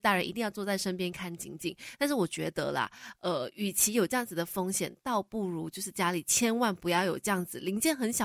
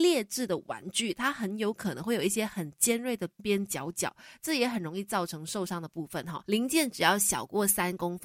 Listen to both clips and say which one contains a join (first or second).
second